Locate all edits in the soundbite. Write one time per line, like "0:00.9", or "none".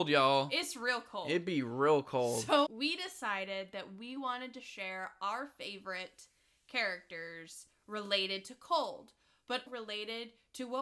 0:02.7
0:09.7